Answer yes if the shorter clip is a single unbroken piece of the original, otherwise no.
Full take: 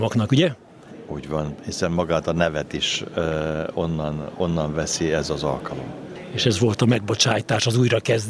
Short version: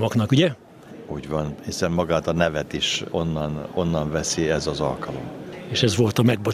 no